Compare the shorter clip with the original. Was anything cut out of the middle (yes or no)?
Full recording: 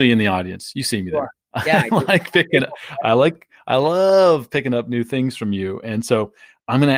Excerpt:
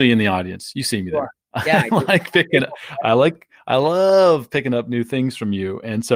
no